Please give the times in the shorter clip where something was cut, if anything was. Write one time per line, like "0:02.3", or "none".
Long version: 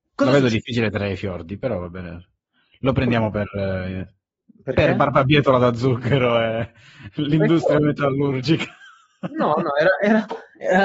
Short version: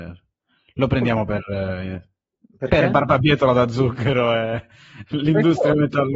none

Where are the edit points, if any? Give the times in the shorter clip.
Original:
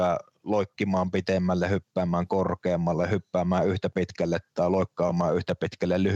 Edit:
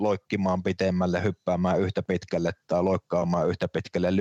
0:01.2

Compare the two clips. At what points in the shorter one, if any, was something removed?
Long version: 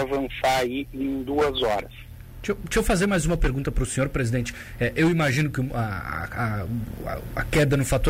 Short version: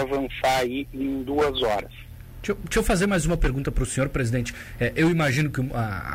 none

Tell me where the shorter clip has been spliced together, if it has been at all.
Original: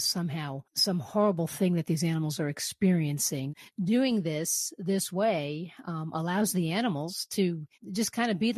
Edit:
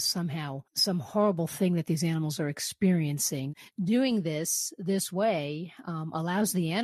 none

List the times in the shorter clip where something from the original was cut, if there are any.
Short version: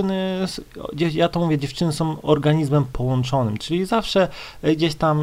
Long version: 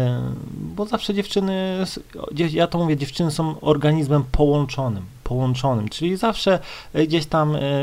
0:02.9

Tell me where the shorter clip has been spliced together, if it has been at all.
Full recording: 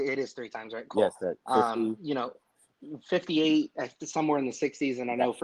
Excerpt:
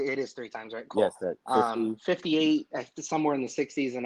0:02.0

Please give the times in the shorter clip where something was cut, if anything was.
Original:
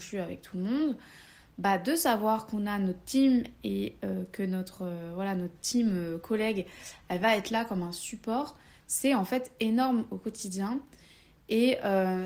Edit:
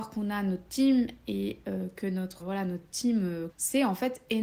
0:02.4
0:03.5

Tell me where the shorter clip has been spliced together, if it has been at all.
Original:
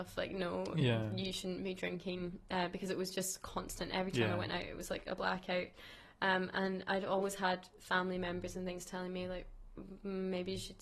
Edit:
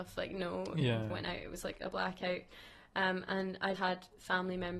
0:01.1
0:03.7

